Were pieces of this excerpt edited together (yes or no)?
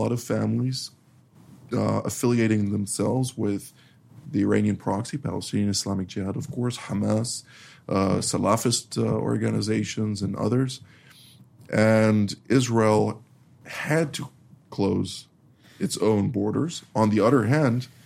no